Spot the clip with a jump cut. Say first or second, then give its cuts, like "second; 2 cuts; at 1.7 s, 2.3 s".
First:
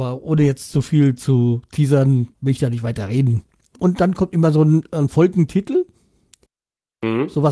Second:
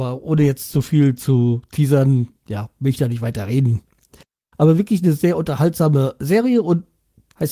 first; 2 cuts; at 2.3 s, 3.8 s